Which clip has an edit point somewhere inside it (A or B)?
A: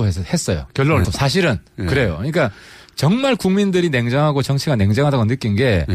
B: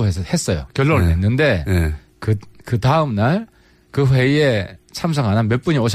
A